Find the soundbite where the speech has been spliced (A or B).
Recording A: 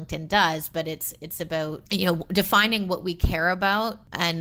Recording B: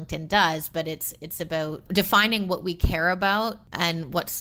B